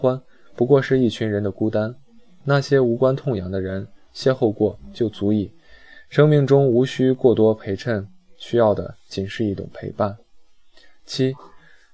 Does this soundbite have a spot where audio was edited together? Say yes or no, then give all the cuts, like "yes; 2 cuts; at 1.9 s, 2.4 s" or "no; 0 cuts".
no; 0 cuts